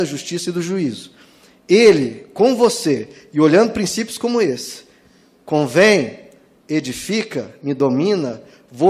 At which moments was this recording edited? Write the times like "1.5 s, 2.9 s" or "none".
none